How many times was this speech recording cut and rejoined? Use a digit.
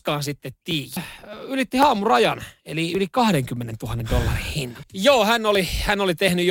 2